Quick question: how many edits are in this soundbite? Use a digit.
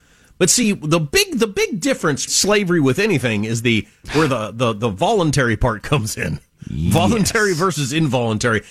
1